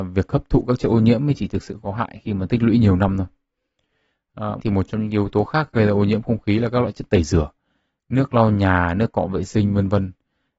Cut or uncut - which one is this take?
cut